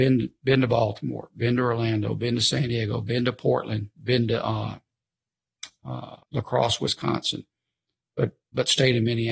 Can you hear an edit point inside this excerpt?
yes; 1 cut; at 6.2 s

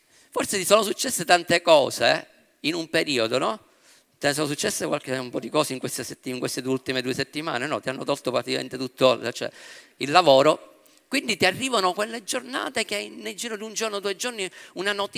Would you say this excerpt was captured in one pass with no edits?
yes; 0 cuts

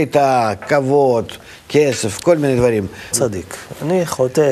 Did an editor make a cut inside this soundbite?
yes; 1 cut; at 3.1 s

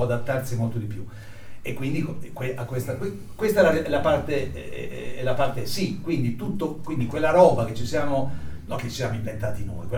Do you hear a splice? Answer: no; 0 cuts

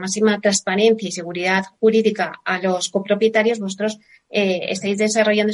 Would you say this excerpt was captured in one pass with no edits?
yes; 0 cuts

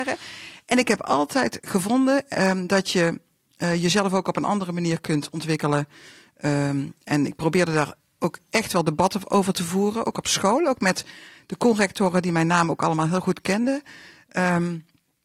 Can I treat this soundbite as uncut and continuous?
yes; 0 cuts

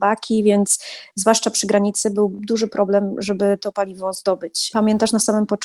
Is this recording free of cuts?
no; 1 cut; at 4.7 s

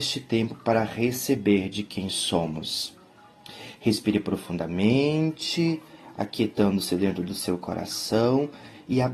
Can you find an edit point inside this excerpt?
no; 0 cuts

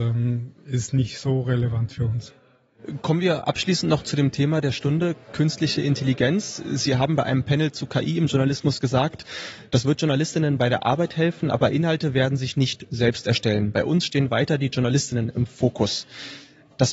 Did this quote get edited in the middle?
no; 0 cuts

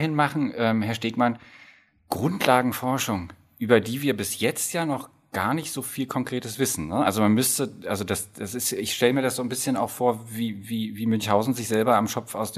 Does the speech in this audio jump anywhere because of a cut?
no; 0 cuts

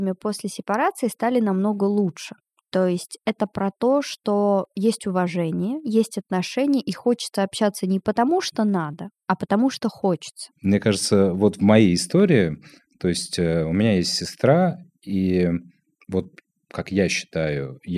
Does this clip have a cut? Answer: no; 0 cuts

